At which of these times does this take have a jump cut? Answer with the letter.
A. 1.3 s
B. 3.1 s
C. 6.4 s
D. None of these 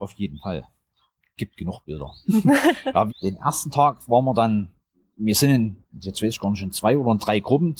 B